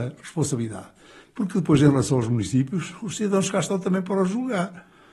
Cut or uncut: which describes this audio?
uncut